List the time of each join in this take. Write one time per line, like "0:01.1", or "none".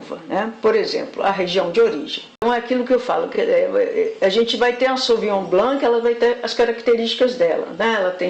none